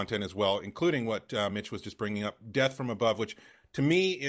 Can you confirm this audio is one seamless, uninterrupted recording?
yes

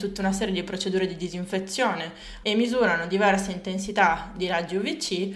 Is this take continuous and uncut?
no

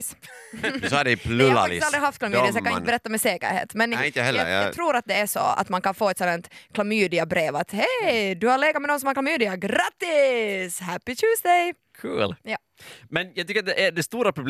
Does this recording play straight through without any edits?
yes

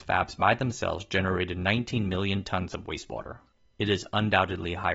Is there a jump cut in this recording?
no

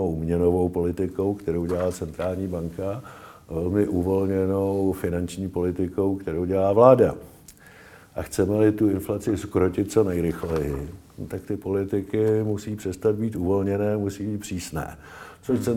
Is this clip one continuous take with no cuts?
yes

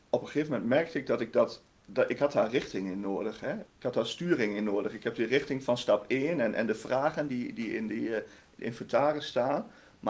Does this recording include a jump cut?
yes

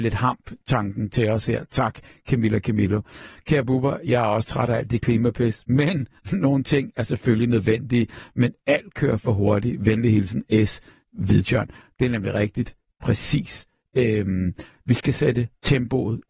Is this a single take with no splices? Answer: yes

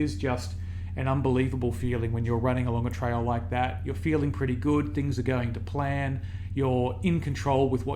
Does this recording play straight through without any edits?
yes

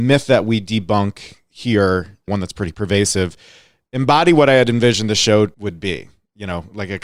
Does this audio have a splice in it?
no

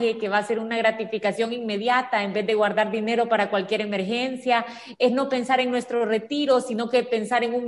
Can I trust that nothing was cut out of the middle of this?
yes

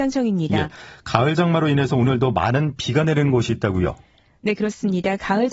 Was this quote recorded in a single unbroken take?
yes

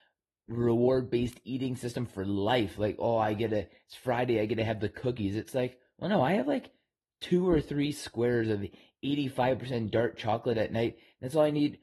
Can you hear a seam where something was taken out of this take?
no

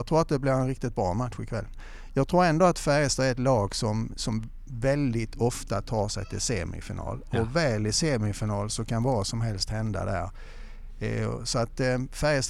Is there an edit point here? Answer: no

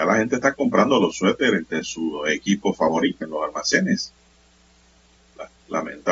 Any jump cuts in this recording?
yes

